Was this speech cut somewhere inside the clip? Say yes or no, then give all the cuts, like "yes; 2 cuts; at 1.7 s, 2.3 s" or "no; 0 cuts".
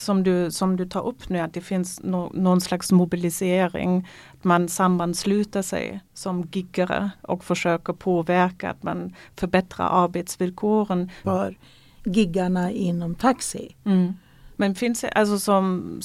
yes; 2 cuts; at 11.2 s, 14.5 s